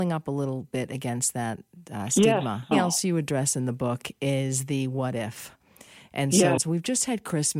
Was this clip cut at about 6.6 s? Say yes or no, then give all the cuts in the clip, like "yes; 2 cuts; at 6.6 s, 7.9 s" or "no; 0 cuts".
yes; 2 cuts; at 2.7 s, 6.6 s